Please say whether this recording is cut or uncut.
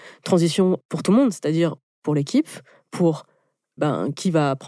cut